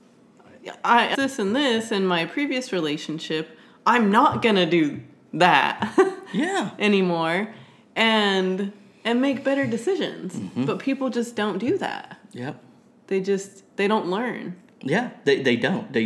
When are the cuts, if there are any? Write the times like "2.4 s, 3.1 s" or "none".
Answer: 1.1 s